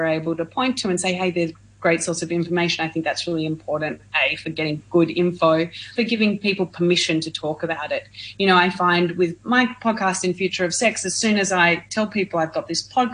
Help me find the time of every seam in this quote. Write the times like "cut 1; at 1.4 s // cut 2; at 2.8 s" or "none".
cut 1; at 6.0 s